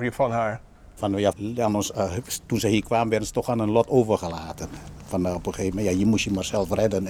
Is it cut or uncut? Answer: cut